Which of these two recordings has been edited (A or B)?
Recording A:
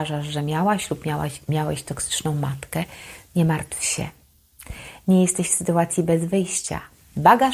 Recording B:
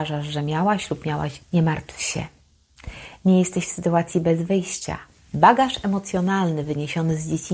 B